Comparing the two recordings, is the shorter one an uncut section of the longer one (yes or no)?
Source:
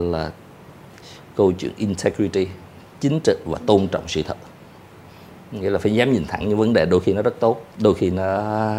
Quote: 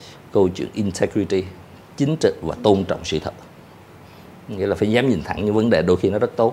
yes